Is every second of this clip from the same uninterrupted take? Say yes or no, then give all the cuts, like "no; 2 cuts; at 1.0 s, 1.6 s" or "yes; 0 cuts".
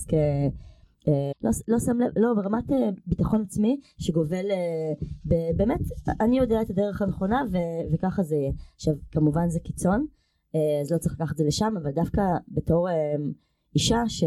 no; 1 cut; at 1.3 s